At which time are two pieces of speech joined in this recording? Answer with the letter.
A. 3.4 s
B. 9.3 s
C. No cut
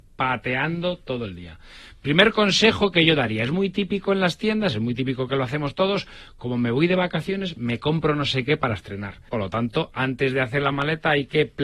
B